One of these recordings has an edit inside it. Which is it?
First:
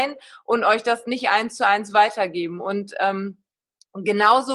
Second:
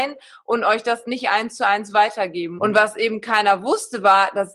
second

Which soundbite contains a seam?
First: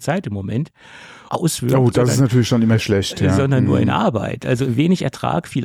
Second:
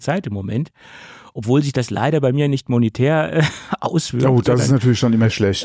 first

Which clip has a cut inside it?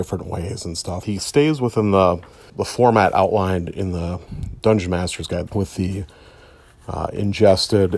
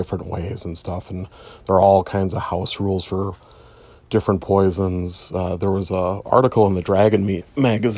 first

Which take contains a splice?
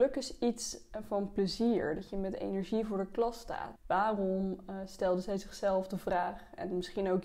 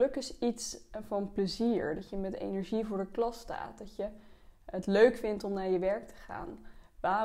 first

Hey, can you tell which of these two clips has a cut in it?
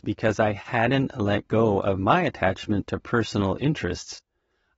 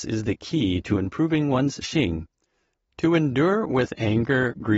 second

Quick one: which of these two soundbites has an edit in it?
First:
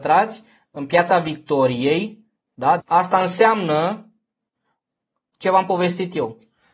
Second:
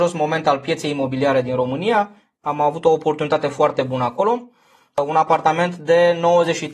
first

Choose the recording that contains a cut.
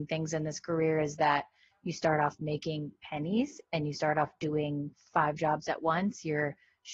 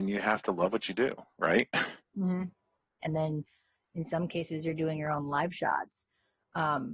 second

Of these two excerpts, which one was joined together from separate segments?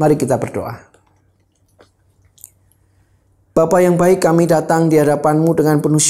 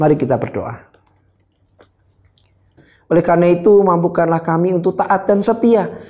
second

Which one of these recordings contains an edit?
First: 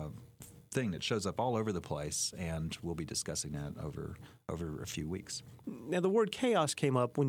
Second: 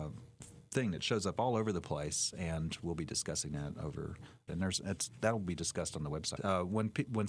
second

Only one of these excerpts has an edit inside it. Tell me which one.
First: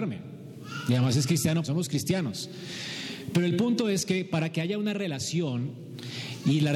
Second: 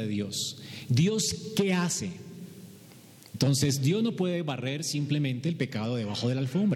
first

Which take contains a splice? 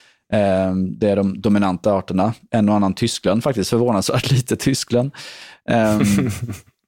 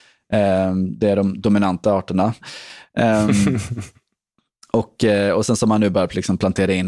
second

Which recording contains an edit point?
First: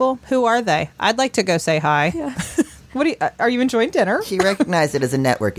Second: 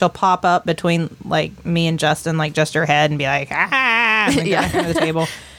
first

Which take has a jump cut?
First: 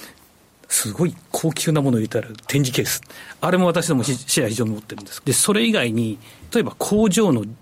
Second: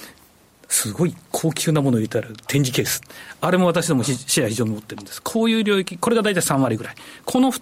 first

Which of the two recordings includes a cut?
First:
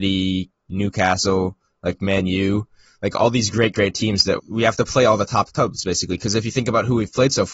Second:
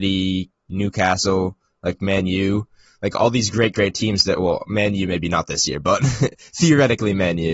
first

